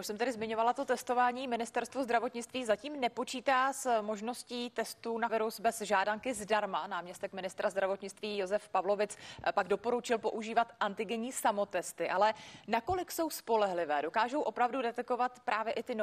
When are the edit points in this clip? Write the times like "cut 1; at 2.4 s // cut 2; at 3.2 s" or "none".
cut 1; at 5.3 s